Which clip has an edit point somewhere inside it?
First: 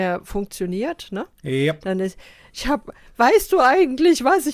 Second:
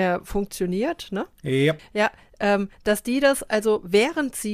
second; 1 cut; at 1.8 s

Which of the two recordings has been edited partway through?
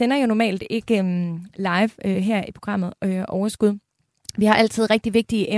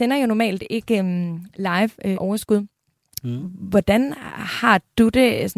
second; 2 cuts; at 2.1 s, 3.2 s

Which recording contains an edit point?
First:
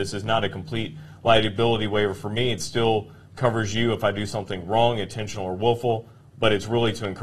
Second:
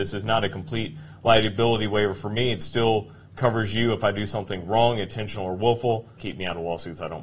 second; 1 cut; at 6.2 s

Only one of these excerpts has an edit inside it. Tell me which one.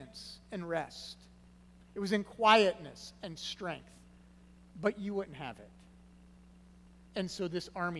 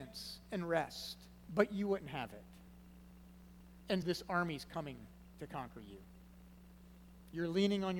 second; 2 cuts; at 1.5 s, 4.0 s

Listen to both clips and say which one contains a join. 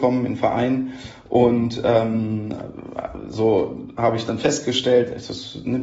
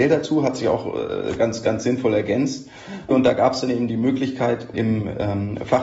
second; 2 cuts; at 3.1 s, 4.7 s

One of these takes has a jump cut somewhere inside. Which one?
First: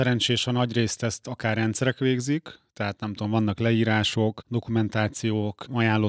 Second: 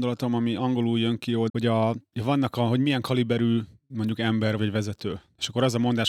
second; 2 cuts; at 1.5 s, 4.6 s

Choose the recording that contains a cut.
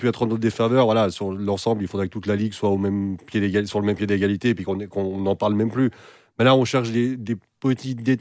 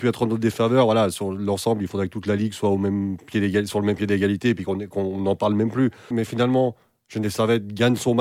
second; 1 cut; at 6.1 s

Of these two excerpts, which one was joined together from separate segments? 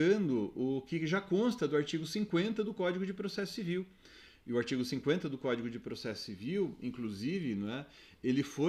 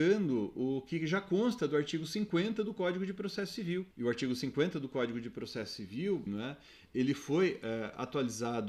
second; 2 cuts; at 3.9 s, 6.3 s

